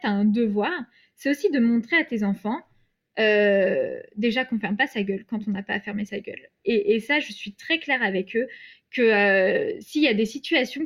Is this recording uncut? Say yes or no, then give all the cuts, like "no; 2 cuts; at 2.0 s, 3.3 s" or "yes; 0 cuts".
yes; 0 cuts